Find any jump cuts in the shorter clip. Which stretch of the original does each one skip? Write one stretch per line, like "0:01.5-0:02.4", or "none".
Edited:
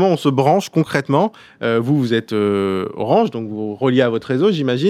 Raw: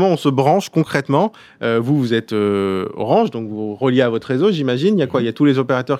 none

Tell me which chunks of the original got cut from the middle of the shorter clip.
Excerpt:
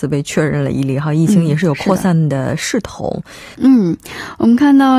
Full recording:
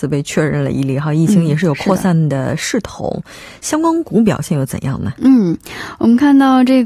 0:03.5-0:05.2

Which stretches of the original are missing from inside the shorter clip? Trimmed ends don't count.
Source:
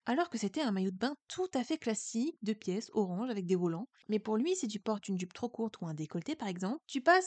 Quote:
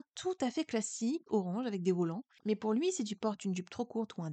0:02.4-0:02.9

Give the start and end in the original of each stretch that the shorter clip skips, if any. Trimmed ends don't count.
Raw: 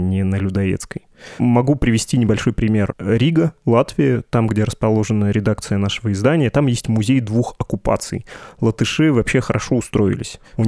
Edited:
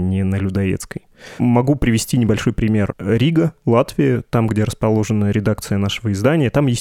none

